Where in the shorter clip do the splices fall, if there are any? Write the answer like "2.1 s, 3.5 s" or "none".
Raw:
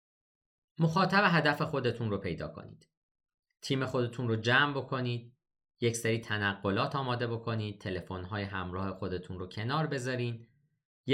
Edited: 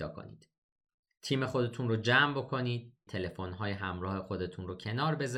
3.1 s